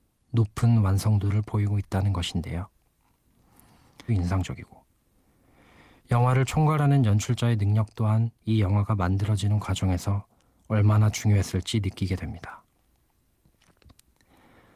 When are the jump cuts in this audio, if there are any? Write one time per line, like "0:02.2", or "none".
0:04.1
0:08.4

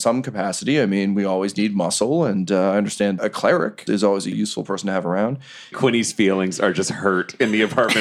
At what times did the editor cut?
0:03.9
0:05.7

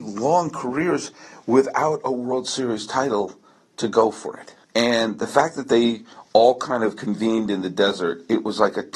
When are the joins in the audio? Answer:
0:04.6

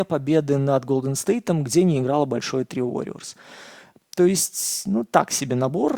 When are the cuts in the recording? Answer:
0:04.0

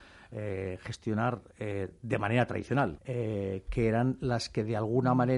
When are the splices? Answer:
0:03.0

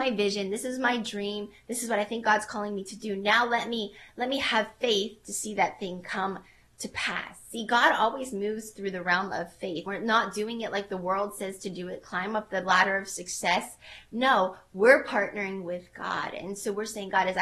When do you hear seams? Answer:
0:09.9

